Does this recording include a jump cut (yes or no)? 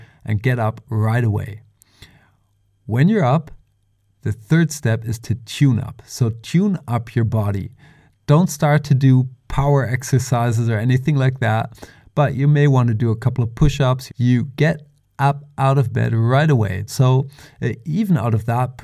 yes